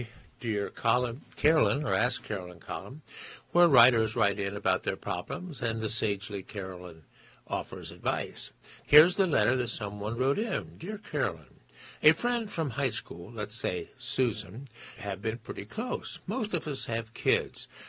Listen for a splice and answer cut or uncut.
cut